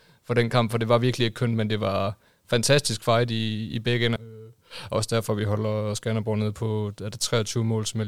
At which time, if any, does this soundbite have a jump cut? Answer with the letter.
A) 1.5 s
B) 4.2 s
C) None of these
B